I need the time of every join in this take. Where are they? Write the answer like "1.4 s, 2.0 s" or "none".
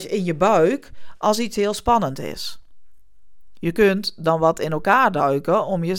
none

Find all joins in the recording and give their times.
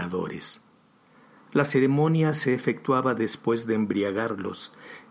none

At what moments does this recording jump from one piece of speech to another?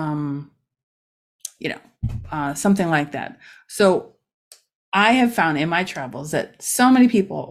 none

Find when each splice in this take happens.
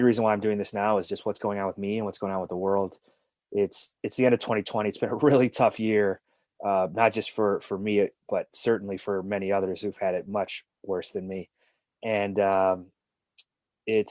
none

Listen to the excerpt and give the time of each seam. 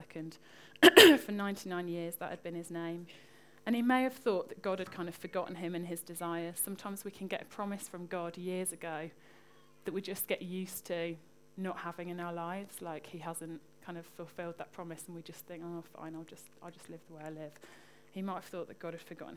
none

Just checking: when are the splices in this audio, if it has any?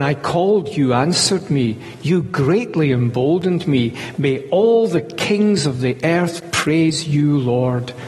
none

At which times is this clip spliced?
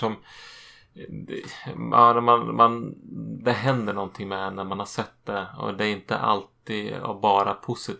none

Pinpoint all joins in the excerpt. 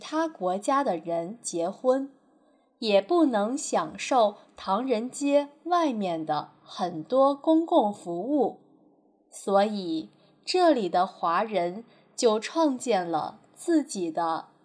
none

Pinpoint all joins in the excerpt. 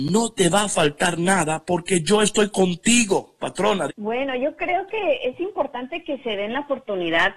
3.9 s

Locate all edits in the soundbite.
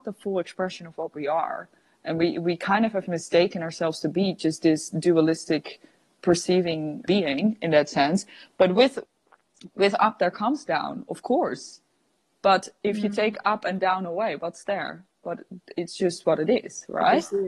none

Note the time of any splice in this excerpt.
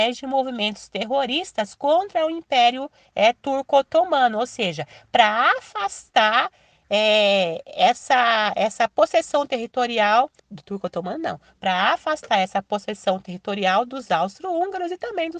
10.4 s

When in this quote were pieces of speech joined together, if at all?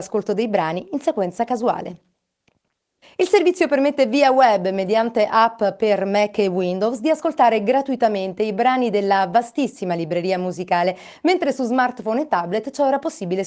3.0 s

